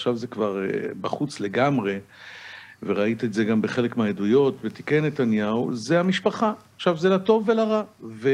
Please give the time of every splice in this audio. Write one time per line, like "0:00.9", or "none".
none